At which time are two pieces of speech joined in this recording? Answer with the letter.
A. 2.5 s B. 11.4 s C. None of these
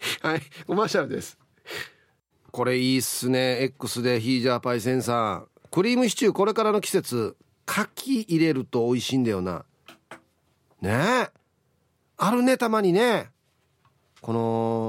A